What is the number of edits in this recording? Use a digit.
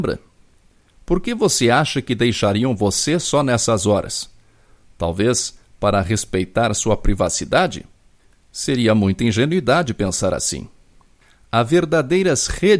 0